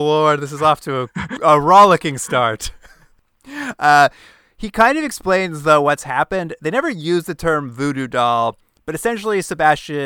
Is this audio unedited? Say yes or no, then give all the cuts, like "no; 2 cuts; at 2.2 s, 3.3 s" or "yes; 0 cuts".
yes; 0 cuts